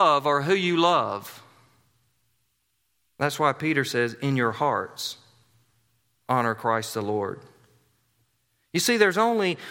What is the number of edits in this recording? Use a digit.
0